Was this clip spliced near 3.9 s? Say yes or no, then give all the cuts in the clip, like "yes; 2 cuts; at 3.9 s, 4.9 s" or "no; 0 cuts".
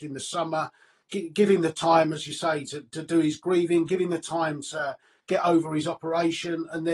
no; 0 cuts